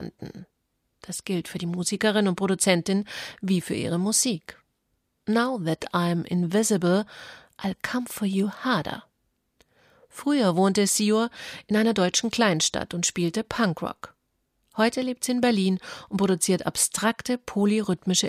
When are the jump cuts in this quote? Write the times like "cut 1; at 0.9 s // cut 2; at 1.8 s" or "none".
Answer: none